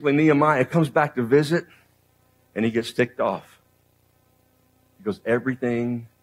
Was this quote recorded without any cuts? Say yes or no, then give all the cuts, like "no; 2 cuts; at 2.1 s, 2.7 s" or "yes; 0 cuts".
yes; 0 cuts